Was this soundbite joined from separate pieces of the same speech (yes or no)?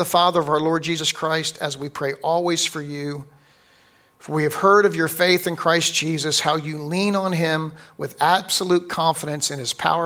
no